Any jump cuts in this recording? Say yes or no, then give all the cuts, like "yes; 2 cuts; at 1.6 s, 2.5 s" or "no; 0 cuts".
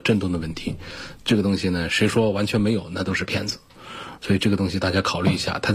no; 0 cuts